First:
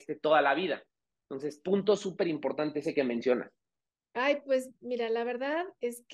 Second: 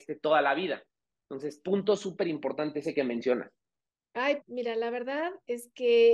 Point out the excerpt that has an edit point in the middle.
second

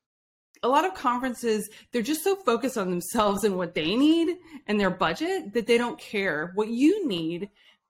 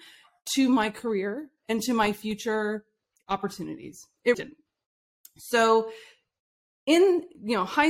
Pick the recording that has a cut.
second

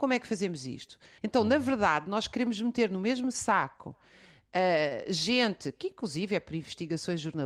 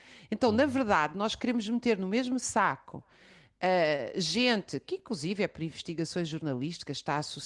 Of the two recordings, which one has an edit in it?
first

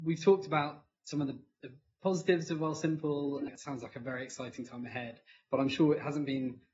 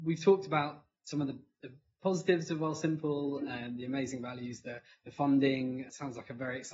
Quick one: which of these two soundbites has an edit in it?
first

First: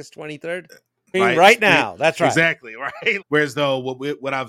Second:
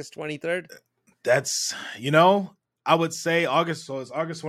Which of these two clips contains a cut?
first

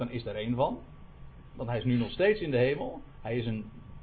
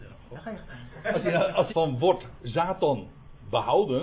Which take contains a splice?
second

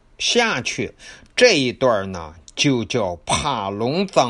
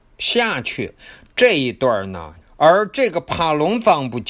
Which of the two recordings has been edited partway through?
second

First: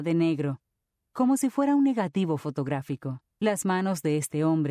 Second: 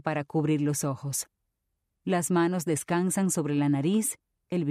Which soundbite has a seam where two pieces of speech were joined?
first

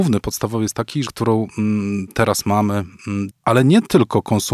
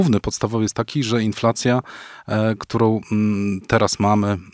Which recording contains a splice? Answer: first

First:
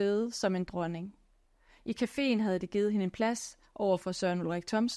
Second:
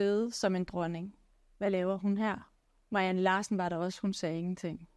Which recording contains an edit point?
second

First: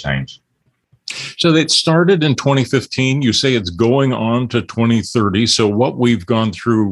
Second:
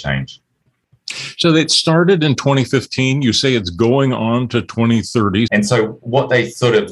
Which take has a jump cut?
second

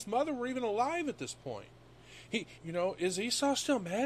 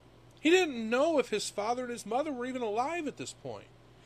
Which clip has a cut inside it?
first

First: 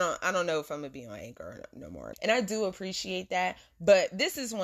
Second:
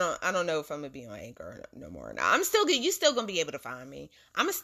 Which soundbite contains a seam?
first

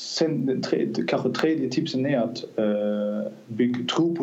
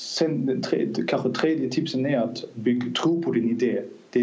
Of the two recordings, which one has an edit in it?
second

